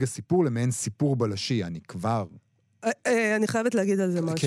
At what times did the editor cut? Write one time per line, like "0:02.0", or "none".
none